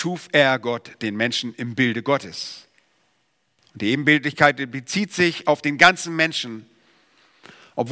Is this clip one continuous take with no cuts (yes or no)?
yes